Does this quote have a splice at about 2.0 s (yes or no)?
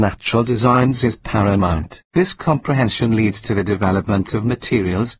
yes